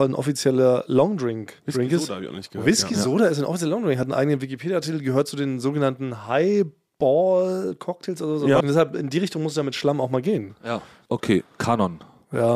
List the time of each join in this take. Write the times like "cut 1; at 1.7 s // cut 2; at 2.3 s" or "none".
cut 1; at 8.6 s // cut 2; at 11.1 s